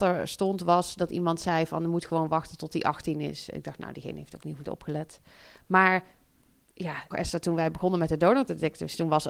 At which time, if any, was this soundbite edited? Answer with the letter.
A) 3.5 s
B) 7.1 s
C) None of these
B